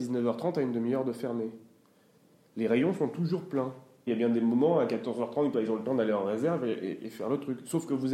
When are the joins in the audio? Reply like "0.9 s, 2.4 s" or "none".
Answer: 4.1 s, 5.5 s